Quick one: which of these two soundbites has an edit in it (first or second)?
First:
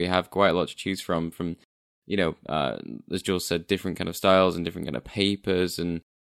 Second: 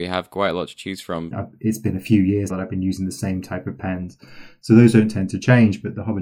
second